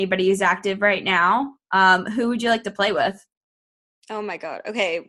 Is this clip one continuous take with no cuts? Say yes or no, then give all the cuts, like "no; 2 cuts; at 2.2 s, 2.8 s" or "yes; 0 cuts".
yes; 0 cuts